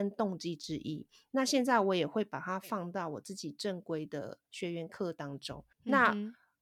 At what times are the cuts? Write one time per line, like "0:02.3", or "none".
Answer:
0:05.7